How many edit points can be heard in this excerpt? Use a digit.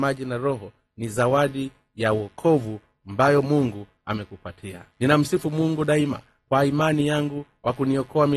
1